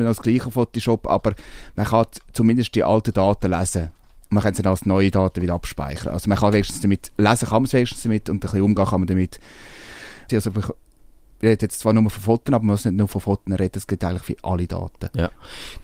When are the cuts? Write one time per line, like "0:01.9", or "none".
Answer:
0:10.3